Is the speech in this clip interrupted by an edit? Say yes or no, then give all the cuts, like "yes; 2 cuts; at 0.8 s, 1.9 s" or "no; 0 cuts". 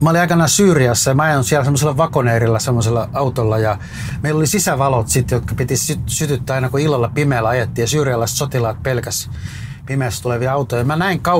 no; 0 cuts